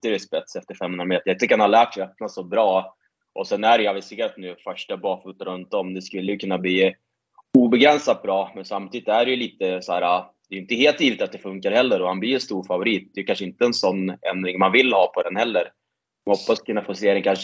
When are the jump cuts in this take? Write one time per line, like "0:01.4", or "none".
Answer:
none